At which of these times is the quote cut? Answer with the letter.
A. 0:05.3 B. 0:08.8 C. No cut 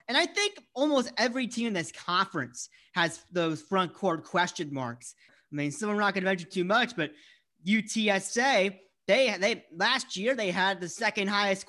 A